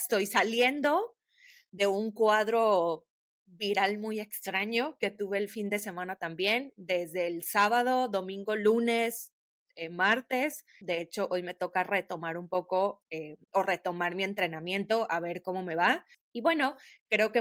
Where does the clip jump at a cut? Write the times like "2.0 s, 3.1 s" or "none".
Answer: 10.8 s, 16.1 s

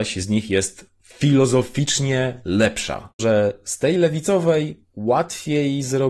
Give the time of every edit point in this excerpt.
3.2 s

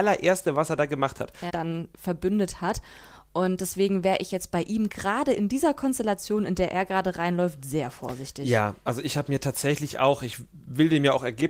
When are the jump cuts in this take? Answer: 1.5 s

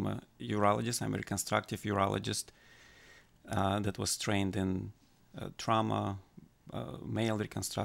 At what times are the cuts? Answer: none

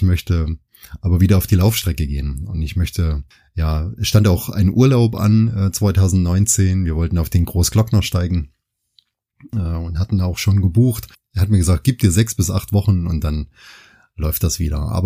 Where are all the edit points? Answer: none

